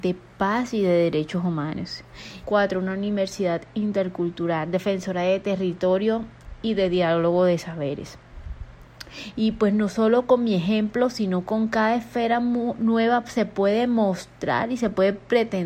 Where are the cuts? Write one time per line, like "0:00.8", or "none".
0:02.4
0:09.3